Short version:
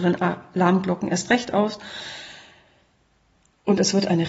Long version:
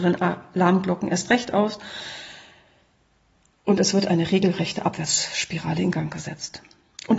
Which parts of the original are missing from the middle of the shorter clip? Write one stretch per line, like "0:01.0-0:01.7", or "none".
none